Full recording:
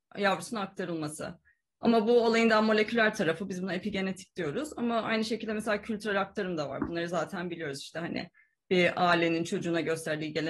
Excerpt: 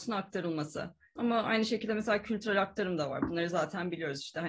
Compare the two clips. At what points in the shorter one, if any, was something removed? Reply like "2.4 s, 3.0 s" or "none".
1.2 s